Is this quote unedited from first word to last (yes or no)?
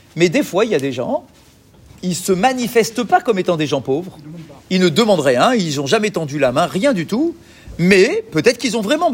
yes